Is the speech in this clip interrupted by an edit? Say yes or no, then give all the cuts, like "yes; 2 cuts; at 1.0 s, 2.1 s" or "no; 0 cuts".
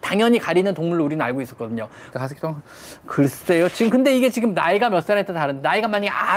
yes; 1 cut; at 2.1 s